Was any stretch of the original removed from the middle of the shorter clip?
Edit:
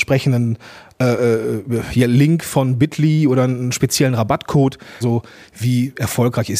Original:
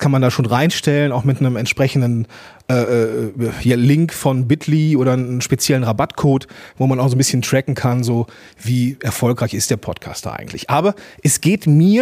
yes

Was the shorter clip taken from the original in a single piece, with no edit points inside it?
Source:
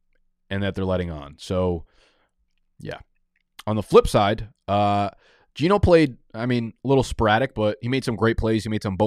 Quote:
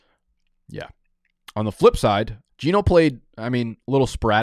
no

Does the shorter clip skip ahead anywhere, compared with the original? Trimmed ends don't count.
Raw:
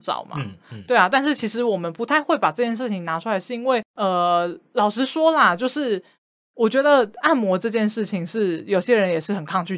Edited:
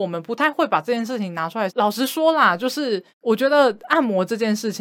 yes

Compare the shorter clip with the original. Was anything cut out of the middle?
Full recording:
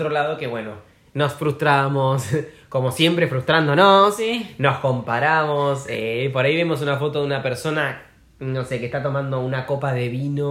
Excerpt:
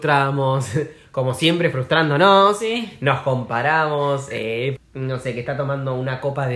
yes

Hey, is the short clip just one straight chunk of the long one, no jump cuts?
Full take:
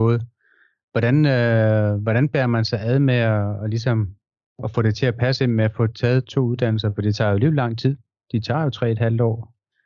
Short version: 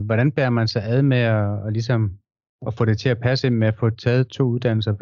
yes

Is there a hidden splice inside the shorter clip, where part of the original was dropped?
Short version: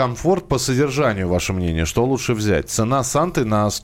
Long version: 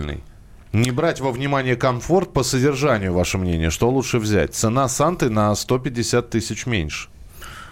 no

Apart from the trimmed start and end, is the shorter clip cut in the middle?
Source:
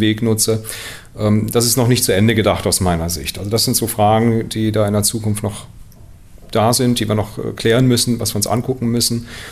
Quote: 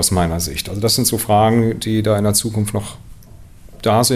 no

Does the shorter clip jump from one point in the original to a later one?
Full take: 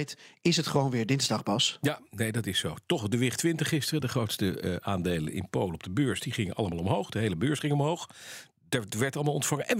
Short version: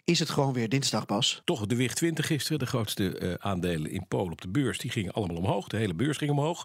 yes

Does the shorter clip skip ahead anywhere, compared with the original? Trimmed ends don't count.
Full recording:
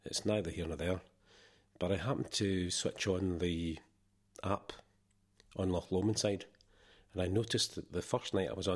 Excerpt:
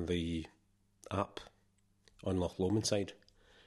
no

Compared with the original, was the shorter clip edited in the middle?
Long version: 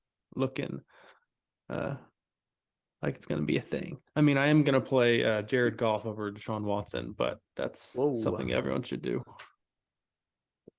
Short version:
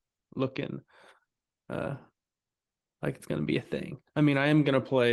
no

